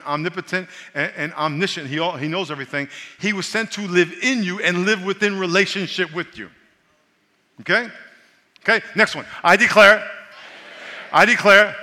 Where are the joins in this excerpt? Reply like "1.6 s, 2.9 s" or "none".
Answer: none